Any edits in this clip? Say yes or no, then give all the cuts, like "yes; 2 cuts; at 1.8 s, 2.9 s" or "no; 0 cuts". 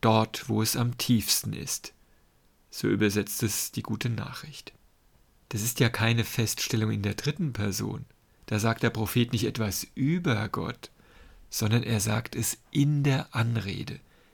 no; 0 cuts